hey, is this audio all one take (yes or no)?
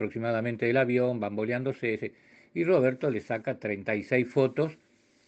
yes